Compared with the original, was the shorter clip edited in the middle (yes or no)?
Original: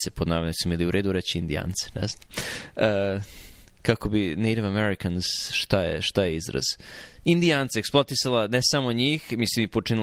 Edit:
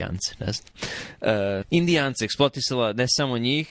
yes